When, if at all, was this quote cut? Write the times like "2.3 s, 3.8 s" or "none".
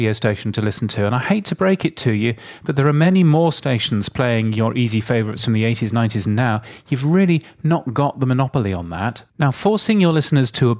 9.3 s